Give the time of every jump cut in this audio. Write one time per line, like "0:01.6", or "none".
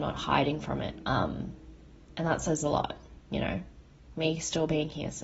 0:01.0
0:03.2